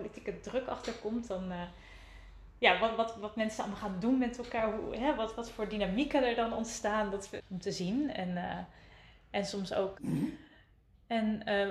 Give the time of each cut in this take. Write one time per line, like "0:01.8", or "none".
0:07.4
0:09.9